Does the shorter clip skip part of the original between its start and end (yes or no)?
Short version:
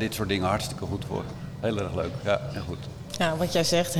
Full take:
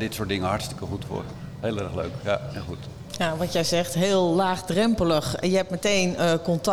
no